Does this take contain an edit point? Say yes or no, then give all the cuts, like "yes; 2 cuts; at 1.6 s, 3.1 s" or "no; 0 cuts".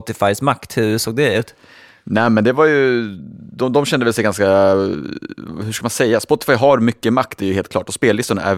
no; 0 cuts